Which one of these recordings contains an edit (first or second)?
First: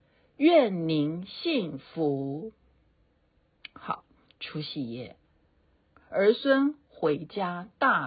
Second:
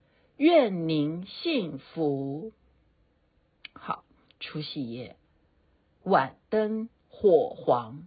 first